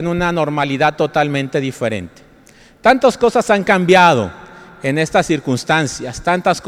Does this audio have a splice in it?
no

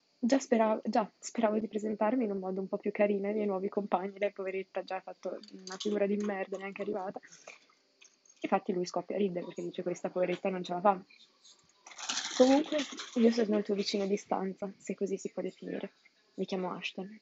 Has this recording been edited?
no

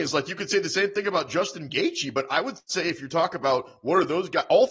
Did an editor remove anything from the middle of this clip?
no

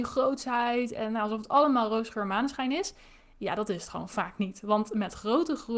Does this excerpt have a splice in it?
no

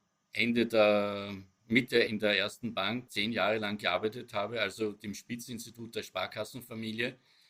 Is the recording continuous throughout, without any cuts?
no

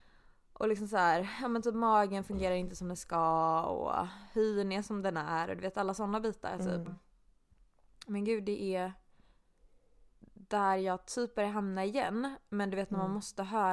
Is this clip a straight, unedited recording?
no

